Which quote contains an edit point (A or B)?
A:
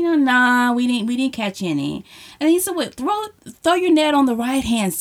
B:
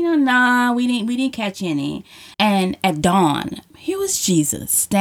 B